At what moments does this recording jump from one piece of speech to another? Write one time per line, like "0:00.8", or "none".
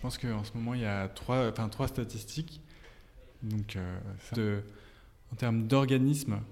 0:03.3
0:04.3